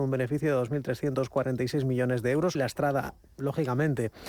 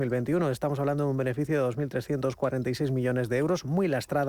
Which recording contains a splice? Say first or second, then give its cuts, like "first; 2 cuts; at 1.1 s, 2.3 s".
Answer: first; 1 cut; at 2.5 s